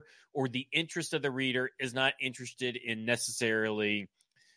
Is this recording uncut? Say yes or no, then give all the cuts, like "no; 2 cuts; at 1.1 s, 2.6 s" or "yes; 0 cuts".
yes; 0 cuts